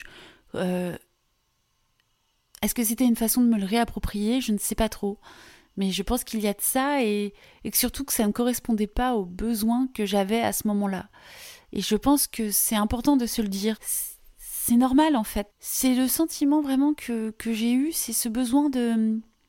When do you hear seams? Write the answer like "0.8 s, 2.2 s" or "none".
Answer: 13.8 s, 15.5 s